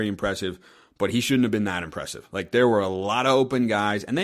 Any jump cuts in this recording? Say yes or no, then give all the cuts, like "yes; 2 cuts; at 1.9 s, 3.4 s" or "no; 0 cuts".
no; 0 cuts